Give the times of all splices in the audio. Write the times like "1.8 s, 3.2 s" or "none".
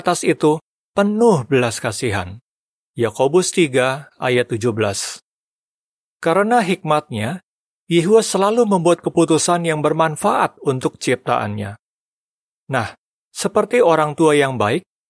none